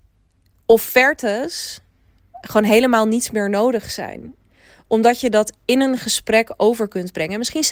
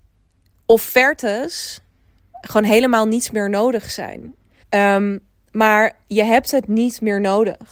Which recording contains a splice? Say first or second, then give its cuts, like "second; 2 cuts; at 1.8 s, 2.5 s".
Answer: second; 1 cut; at 4.6 s